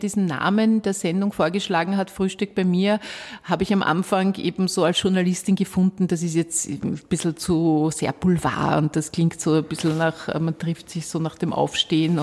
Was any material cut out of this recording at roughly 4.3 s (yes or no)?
no